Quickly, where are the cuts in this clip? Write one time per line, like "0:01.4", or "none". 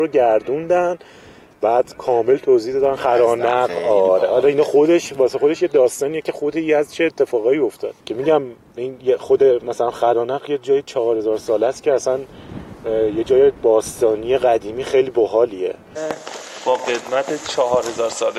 0:08.0